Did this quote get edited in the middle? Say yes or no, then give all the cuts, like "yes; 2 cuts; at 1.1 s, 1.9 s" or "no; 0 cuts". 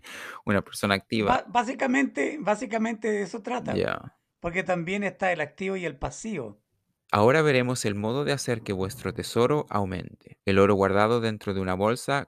yes; 2 cuts; at 7.0 s, 10.4 s